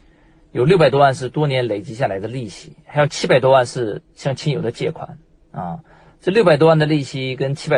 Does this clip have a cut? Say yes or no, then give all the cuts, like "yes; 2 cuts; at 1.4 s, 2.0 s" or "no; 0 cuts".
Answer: no; 0 cuts